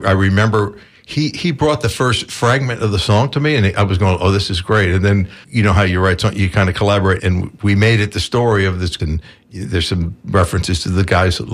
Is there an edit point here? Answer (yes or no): yes